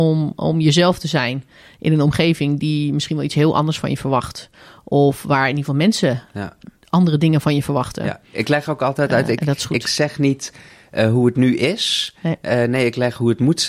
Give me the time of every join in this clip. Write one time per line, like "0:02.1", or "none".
none

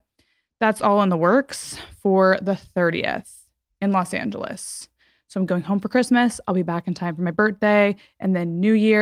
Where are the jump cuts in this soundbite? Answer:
none

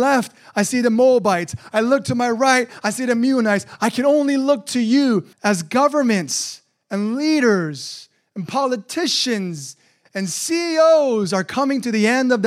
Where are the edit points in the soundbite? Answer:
0:03.8
0:05.3

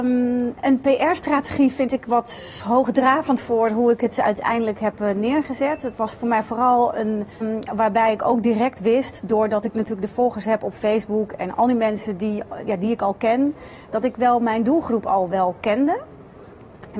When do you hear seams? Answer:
0:07.4

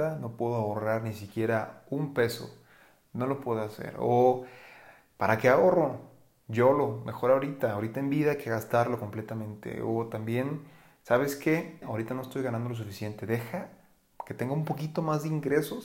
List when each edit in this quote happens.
0:11.8

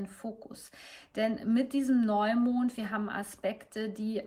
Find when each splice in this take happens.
none

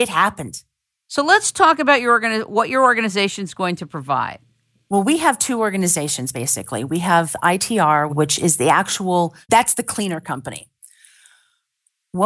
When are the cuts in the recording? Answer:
0:08.1
0:09.4

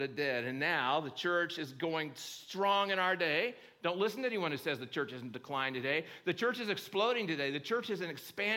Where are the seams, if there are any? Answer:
none

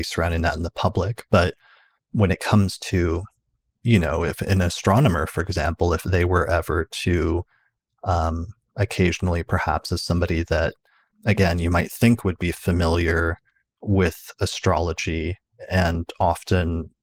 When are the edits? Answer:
none

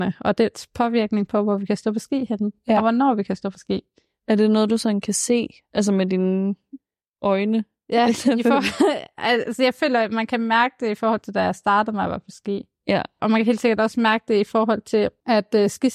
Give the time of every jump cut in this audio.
none

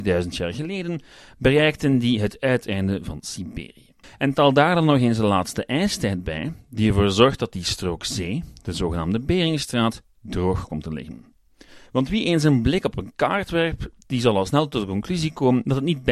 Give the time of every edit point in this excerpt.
0:04.0
0:11.9

